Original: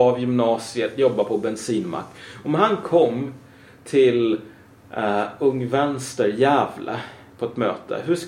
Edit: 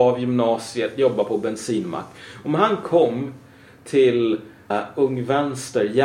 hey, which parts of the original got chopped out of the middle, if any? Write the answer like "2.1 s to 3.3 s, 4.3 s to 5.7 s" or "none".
4.7 s to 5.1 s